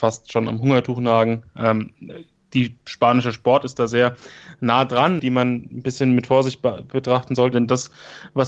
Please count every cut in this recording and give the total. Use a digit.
2